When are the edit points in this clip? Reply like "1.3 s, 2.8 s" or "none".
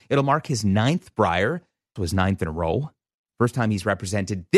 2.0 s